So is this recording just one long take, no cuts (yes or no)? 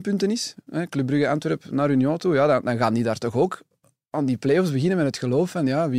yes